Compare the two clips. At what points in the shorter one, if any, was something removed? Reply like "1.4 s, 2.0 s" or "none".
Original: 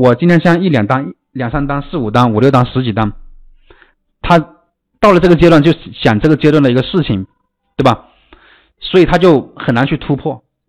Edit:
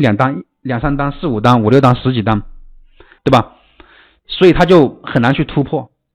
3.2 s